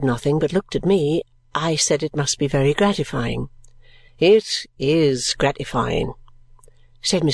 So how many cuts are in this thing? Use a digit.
0